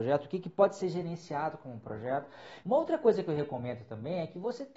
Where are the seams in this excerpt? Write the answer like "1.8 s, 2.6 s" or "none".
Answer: 2.6 s